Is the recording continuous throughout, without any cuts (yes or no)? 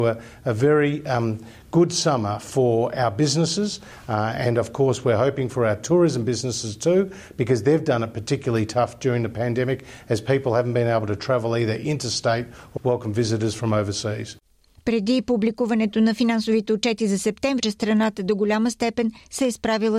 no